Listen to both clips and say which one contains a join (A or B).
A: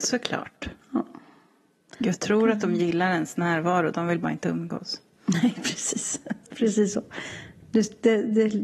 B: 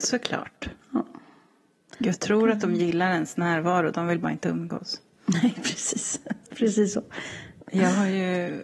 B